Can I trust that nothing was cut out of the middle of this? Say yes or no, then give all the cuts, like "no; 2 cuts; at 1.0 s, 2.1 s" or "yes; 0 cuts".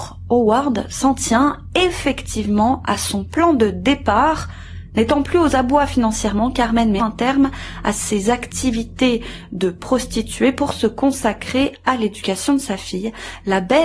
no; 1 cut; at 7.0 s